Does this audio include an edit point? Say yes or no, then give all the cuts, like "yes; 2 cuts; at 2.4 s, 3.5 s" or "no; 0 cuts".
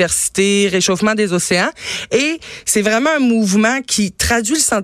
no; 0 cuts